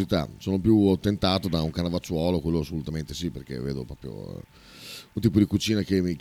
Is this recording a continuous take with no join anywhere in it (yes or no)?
yes